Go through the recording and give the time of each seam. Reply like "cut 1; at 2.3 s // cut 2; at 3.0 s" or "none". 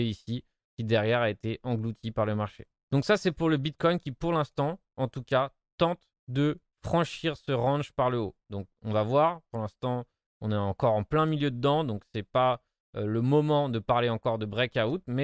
none